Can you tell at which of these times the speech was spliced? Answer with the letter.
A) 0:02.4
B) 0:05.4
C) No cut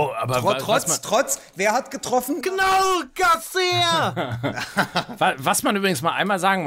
A